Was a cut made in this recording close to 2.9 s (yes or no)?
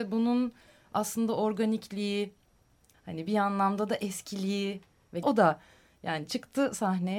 yes